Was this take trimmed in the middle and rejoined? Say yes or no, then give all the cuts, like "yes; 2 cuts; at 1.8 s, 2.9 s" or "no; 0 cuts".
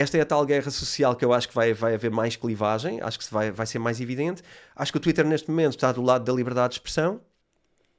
no; 0 cuts